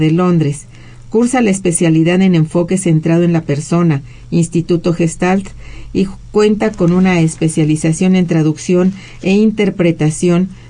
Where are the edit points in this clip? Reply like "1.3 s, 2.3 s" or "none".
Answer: none